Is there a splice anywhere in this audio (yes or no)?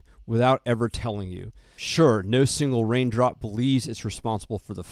yes